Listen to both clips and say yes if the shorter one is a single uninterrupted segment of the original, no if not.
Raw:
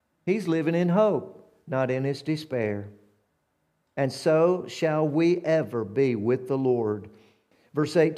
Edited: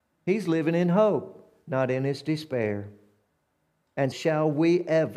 no